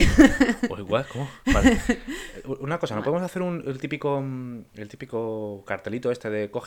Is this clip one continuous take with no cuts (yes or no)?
yes